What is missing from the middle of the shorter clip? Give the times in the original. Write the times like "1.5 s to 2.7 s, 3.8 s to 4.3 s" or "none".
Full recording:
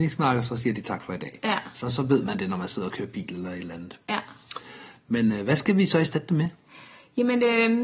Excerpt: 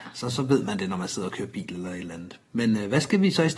4.0 s to 5.0 s